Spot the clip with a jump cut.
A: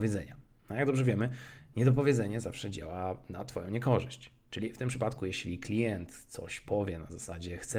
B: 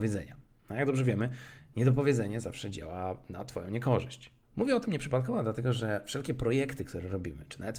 B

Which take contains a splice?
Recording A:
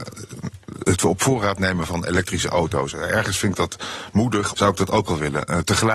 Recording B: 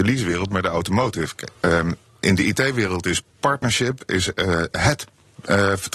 A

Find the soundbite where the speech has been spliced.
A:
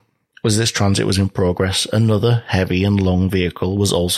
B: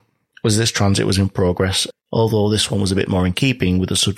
B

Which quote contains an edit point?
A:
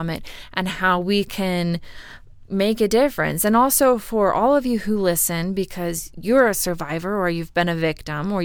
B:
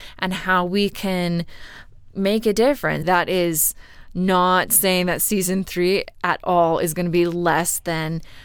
B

